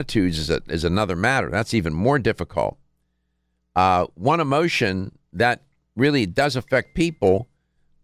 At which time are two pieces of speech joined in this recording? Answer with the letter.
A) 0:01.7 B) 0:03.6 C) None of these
C